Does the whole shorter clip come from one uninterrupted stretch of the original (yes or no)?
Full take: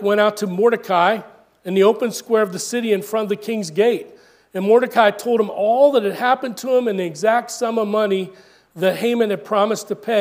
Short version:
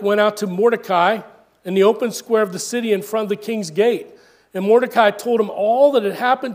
yes